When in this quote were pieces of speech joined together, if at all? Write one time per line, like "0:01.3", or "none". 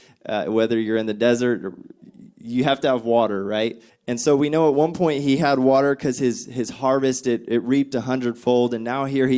0:03.9